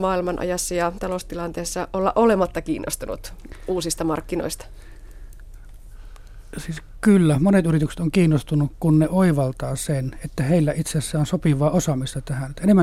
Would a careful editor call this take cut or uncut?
uncut